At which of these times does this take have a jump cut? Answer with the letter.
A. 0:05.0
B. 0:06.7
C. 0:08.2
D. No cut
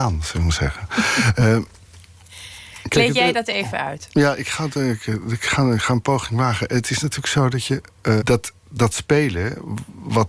C